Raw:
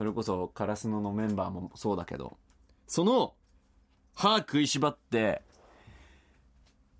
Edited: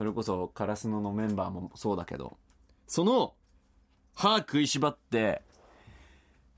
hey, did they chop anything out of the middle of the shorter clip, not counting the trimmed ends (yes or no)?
no